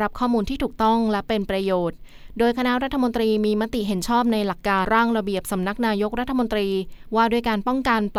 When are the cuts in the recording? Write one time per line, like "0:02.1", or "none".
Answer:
0:04.8